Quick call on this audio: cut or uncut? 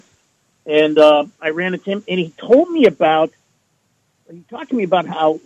uncut